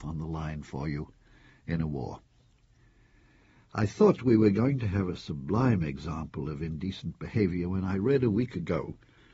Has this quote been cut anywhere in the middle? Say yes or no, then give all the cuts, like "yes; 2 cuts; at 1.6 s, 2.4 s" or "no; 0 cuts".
no; 0 cuts